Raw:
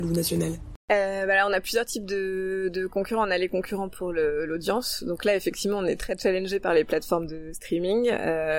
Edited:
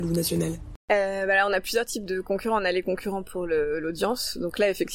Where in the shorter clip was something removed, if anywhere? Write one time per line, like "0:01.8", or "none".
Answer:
0:02.1